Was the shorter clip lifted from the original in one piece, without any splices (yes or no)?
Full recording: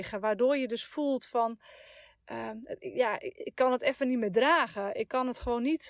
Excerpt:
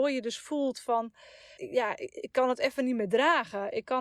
no